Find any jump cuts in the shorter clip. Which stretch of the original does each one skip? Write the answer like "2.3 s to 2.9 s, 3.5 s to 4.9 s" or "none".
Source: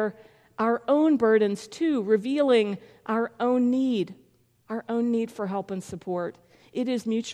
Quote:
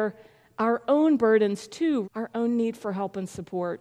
2.0 s to 4.6 s